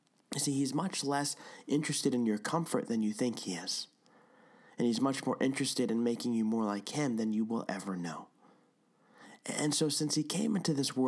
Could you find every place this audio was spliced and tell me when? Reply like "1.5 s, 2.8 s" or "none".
7.7 s